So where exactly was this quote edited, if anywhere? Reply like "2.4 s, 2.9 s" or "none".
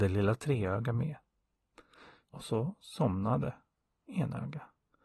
2.2 s